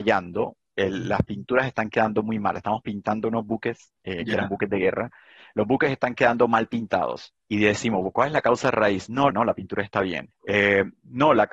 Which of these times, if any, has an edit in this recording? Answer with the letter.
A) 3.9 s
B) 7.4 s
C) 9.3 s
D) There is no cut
C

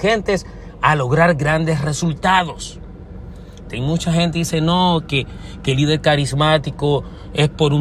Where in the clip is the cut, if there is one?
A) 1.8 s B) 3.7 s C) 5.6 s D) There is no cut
B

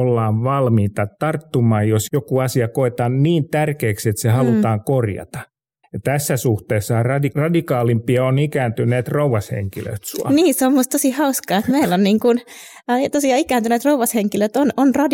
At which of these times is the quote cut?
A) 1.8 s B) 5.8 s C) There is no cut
B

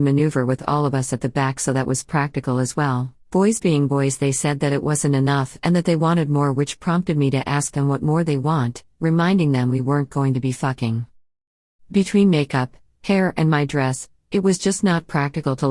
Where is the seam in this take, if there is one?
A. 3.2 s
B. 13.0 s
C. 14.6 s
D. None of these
A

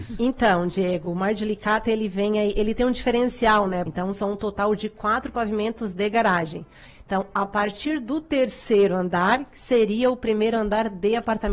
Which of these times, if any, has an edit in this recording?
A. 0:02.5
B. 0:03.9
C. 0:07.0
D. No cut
B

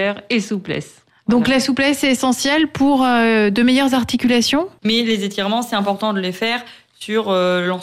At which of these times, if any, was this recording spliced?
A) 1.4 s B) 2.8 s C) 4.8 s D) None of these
C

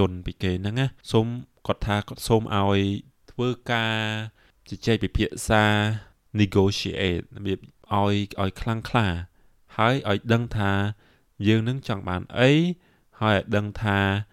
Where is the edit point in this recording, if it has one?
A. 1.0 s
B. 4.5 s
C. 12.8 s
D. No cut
A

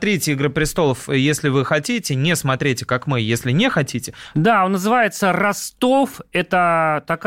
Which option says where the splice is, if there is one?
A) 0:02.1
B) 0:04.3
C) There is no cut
B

